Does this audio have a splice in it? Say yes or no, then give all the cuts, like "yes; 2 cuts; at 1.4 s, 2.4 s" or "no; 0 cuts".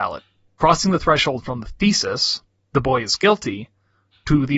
no; 0 cuts